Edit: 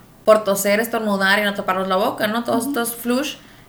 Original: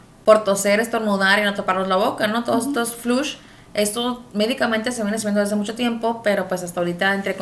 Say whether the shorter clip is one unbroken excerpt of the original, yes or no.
yes